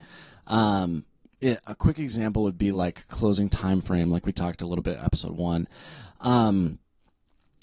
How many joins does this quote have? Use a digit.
0